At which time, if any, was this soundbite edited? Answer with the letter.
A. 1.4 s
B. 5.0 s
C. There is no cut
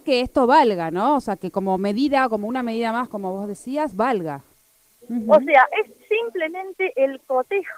B